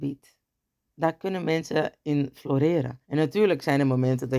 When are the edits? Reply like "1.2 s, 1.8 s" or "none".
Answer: 3.0 s